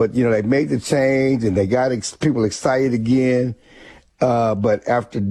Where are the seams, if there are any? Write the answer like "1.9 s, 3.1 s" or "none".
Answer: none

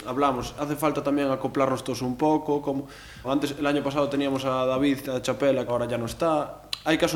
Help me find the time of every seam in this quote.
3.2 s, 5.7 s

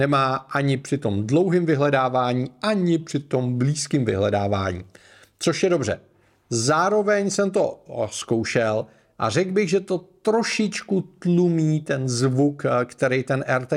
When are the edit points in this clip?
none

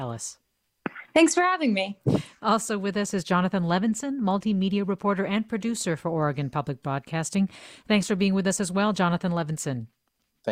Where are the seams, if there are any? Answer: none

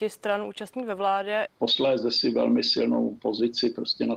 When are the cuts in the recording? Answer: 1.5 s

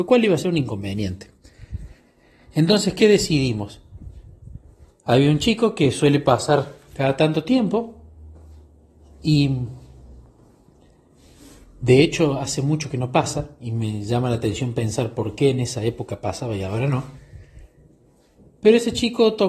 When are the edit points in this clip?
none

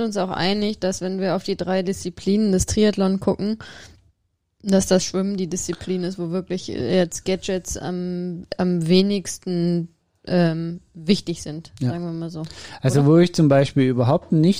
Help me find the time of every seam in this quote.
none

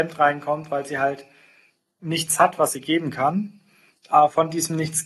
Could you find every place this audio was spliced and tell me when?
none

